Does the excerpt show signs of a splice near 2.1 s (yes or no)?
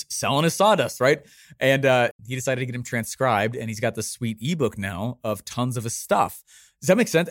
yes